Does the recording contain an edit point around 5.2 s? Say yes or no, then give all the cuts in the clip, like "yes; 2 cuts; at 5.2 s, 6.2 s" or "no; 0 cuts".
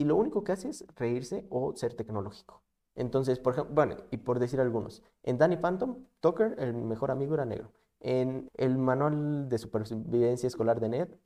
no; 2 cuts; at 2.9 s, 8.5 s